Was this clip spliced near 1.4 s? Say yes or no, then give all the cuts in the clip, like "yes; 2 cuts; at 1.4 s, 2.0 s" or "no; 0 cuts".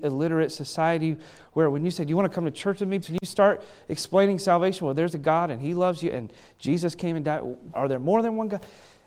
no; 2 cuts; at 3.0 s, 7.7 s